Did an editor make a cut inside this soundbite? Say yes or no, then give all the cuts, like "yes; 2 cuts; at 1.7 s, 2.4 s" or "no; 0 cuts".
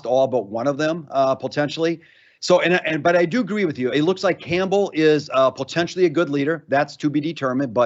no; 0 cuts